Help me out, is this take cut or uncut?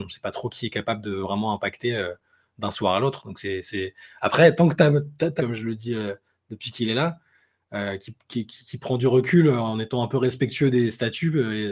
cut